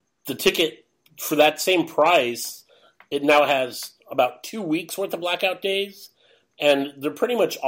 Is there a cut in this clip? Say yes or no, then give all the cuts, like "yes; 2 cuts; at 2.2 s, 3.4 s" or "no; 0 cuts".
no; 0 cuts